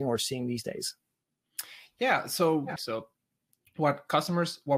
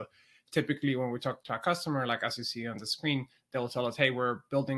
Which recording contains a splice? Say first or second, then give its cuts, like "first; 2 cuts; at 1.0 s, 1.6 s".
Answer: first; 1 cut; at 2.8 s